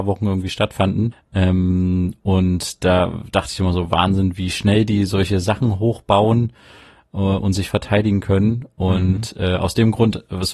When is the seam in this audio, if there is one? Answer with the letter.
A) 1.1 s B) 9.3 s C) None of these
A